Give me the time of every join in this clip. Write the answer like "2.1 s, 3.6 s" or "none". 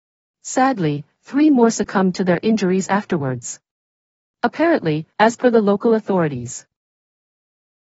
5.1 s

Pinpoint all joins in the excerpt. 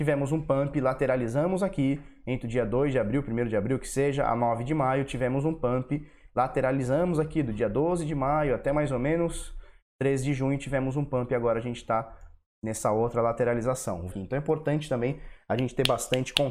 14.1 s

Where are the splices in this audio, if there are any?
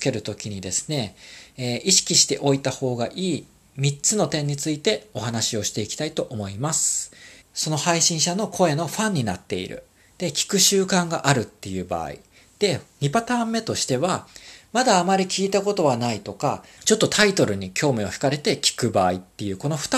7.4 s, 16.8 s

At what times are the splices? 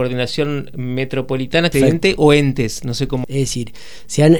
1.7 s, 3.2 s

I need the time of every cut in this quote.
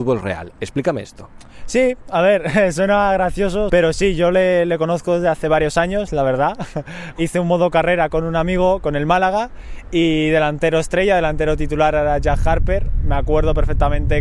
3.7 s, 6.1 s

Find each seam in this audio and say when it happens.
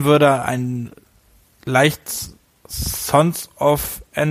none

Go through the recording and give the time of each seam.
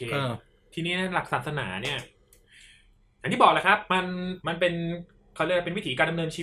4.4 s

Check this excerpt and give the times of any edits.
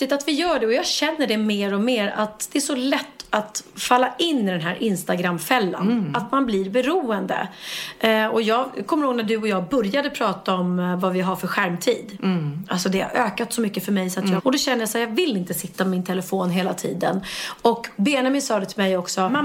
14.4 s

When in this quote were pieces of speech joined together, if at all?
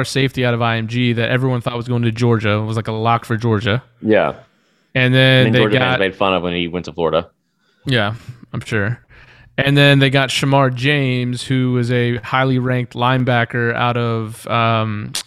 none

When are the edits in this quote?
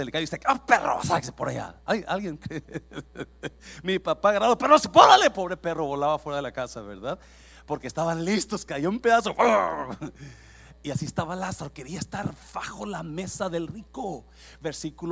none

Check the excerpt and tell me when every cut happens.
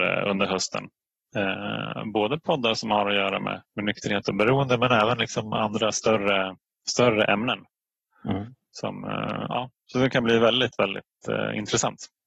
none

